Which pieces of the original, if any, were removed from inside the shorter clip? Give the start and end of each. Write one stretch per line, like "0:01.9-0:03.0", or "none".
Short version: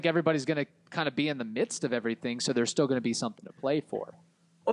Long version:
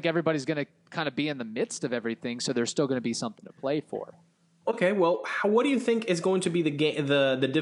none